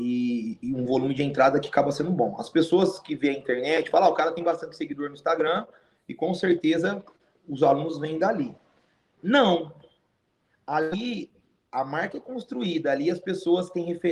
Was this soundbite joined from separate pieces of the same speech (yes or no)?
no